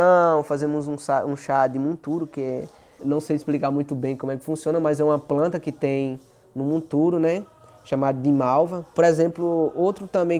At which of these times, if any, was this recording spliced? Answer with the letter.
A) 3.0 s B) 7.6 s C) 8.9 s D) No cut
A